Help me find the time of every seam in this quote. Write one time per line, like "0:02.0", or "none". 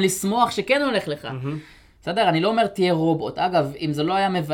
none